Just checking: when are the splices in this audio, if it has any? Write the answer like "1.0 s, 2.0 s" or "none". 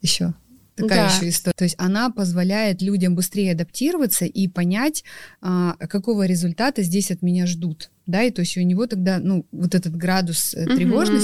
1.5 s